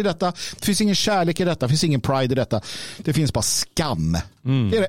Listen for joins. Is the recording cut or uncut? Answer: cut